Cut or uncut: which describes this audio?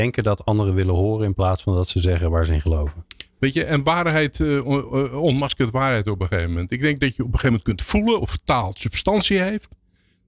uncut